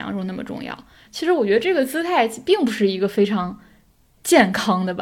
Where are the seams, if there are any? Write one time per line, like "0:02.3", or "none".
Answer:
0:01.1